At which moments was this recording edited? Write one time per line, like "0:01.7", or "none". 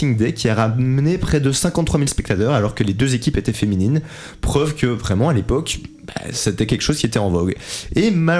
none